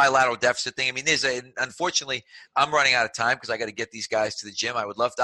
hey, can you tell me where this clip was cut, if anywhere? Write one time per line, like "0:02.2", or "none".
none